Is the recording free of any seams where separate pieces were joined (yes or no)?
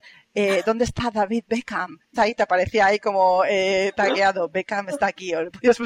no